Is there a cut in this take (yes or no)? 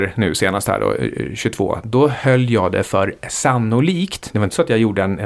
no